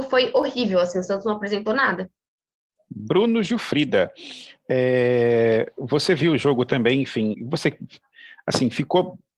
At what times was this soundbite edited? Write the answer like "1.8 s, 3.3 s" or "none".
7.3 s

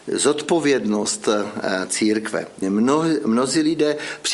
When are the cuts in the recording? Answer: 2.6 s

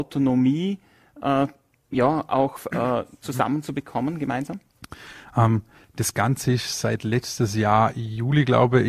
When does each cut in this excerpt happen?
none

